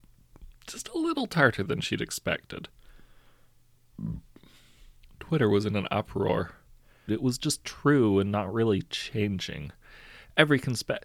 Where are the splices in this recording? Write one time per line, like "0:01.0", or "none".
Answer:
0:07.1